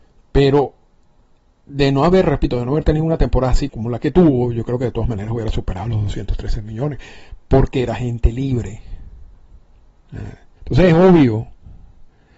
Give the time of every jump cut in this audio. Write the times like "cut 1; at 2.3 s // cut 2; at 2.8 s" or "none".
cut 1; at 3.7 s // cut 2; at 10.6 s